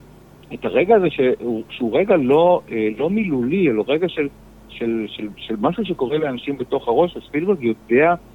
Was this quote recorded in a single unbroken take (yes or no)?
yes